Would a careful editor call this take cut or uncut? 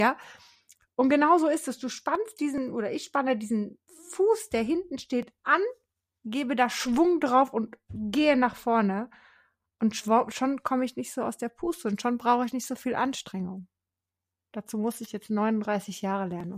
uncut